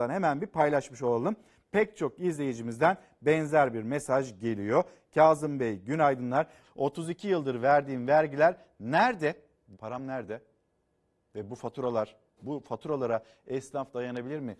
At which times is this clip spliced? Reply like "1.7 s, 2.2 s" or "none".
6.6 s, 9.7 s